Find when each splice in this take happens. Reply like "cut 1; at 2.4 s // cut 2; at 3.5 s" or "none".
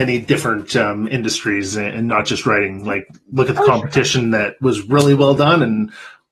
none